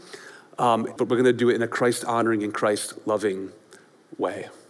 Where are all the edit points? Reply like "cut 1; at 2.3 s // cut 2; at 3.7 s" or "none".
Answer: cut 1; at 1.0 s